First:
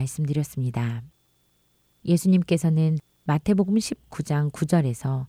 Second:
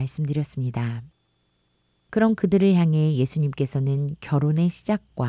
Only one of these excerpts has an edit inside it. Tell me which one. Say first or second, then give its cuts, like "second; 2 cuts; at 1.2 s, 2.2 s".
first; 1 cut; at 1.8 s